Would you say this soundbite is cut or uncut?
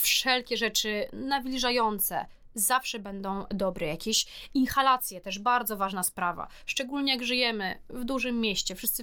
uncut